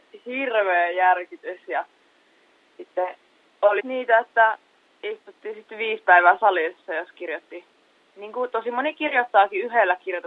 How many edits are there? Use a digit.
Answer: 1